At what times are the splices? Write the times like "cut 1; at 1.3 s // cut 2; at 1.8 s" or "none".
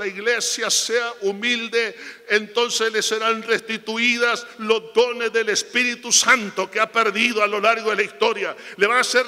none